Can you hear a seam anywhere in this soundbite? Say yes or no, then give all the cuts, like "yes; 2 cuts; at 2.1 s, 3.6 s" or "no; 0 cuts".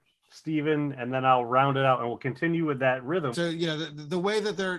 yes; 1 cut; at 3.3 s